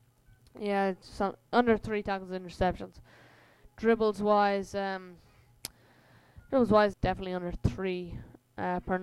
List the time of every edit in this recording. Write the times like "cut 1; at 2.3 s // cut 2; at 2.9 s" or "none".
cut 1; at 6.9 s